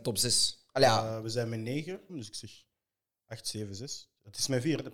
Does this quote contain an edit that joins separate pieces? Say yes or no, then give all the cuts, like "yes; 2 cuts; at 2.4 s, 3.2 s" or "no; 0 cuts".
yes; 1 cut; at 2.1 s